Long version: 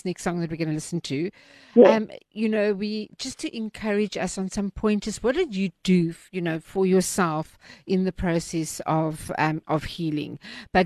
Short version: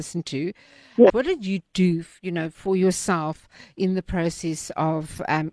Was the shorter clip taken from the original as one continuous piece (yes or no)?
no